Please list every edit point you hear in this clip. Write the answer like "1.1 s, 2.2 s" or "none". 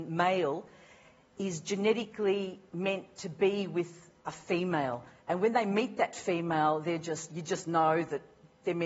4.2 s, 7.3 s